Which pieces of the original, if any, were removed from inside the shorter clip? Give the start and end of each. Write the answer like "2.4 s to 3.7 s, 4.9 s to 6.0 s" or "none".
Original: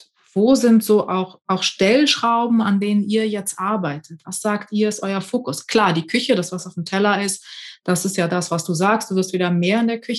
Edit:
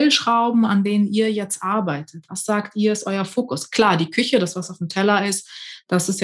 none